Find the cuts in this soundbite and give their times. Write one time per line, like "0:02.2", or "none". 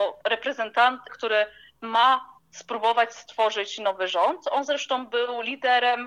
0:01.1